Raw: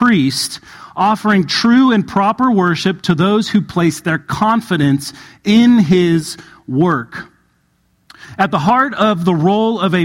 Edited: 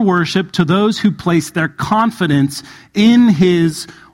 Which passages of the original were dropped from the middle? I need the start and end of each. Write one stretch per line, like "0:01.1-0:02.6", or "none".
none